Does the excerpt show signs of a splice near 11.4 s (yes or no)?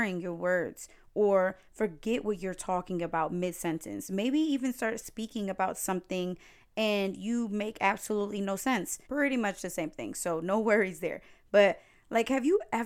no